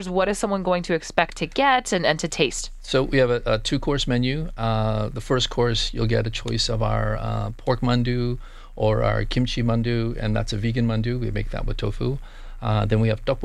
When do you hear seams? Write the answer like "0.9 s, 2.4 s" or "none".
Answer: none